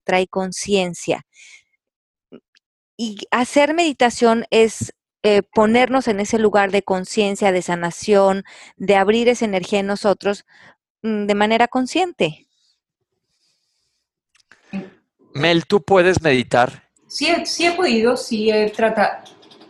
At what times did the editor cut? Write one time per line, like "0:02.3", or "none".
0:15.2
0:17.0